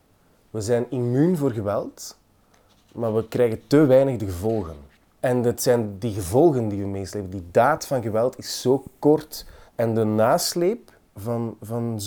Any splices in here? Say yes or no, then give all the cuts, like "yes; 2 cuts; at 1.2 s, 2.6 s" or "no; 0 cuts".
no; 0 cuts